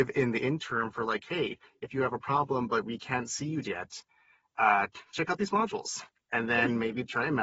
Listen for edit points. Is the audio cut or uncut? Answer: cut